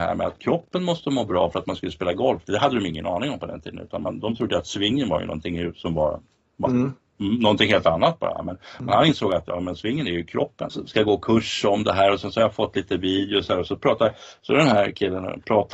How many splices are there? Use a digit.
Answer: 1